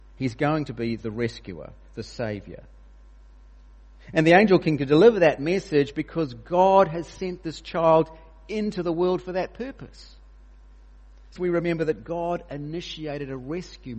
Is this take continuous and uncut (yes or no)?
no